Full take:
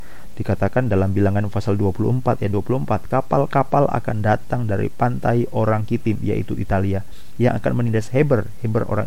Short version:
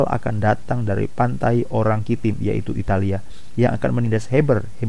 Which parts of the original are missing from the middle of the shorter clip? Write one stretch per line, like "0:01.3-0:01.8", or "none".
none